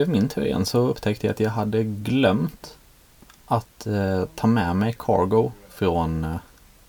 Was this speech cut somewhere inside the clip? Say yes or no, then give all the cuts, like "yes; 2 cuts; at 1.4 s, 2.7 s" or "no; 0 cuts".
no; 0 cuts